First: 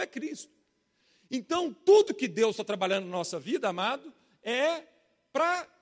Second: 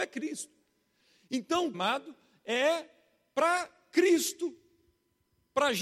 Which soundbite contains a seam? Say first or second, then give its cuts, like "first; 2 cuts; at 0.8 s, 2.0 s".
second; 1 cut; at 1.7 s